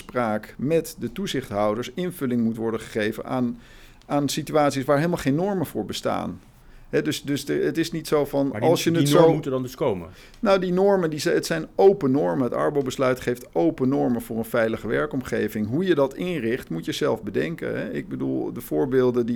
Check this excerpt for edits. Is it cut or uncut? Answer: uncut